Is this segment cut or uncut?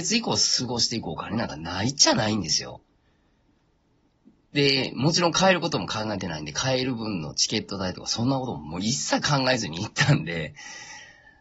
uncut